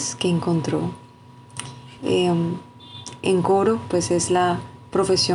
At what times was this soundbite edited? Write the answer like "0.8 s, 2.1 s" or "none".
2.0 s, 3.2 s